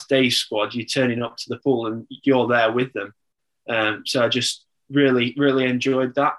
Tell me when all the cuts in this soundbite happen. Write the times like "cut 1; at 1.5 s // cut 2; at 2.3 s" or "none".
none